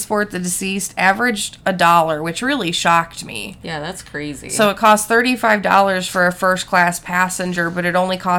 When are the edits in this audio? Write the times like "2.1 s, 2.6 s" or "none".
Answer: none